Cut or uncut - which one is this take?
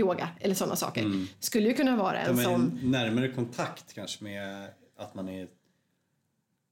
uncut